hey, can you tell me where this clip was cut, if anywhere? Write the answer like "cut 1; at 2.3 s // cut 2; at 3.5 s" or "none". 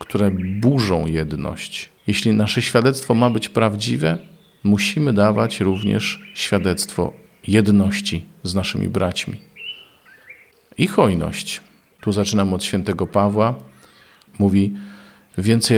cut 1; at 2.0 s // cut 2; at 14.3 s